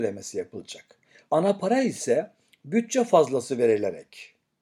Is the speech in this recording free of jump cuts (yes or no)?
no